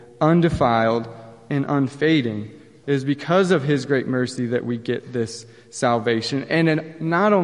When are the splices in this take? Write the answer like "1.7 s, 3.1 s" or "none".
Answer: 2.8 s